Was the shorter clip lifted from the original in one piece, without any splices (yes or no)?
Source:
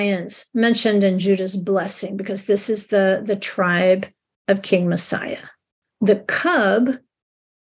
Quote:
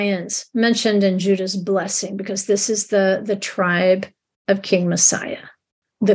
yes